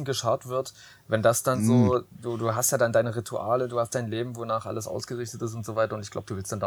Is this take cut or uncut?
uncut